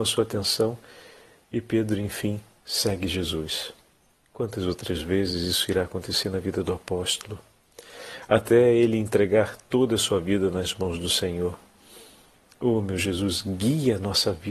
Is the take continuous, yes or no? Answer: yes